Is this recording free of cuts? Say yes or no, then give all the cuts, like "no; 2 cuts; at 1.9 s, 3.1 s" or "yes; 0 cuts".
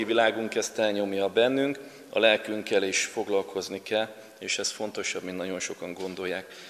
no; 1 cut; at 2.1 s